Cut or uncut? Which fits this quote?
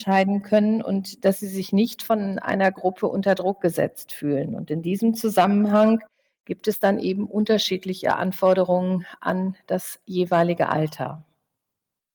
uncut